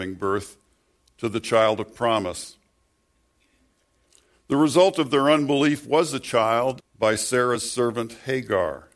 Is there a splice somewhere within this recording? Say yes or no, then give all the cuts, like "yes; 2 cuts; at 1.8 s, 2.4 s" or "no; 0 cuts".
yes; 1 cut; at 6.8 s